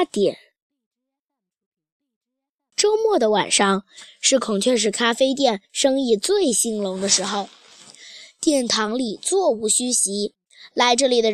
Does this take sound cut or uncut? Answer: uncut